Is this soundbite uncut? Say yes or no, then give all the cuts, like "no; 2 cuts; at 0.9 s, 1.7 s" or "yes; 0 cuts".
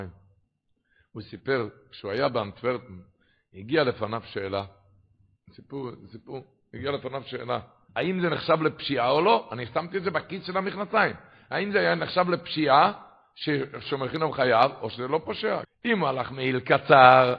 no; 2 cuts; at 7.9 s, 15.6 s